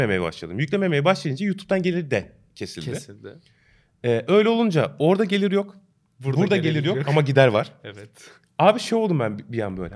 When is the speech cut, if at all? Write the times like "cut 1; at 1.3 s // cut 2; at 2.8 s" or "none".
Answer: none